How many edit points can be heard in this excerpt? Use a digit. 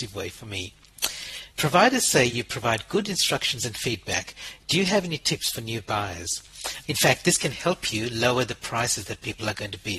2